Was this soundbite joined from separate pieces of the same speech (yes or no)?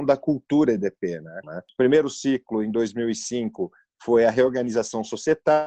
yes